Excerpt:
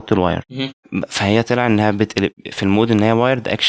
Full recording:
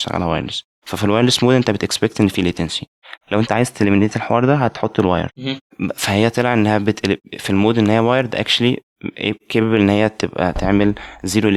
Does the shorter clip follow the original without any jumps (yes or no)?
yes